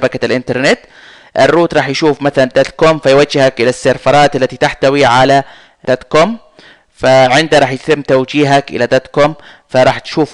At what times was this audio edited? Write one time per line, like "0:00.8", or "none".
0:05.8